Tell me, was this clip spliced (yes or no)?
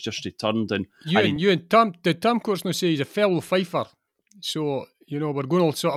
no